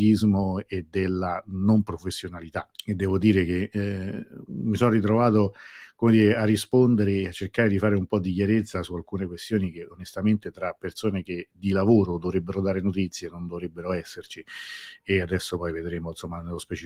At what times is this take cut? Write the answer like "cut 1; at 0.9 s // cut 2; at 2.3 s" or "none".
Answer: cut 1; at 2.7 s

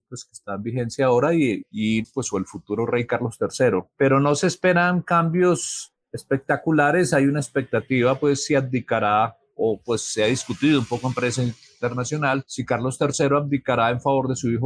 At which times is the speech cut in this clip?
none

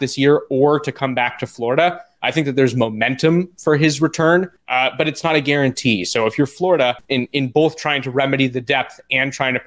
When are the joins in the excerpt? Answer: cut 1; at 7.1 s

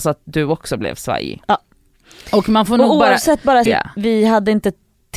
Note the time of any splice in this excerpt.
cut 1; at 3.7 s

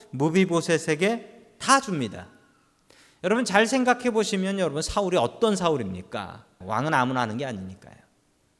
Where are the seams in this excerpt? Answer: cut 1; at 6.6 s

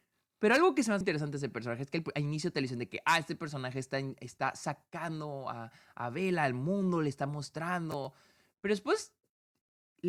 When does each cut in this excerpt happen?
cut 1; at 1.0 s

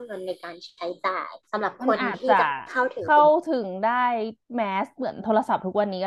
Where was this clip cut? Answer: cut 1; at 1.4 s // cut 2; at 4.4 s

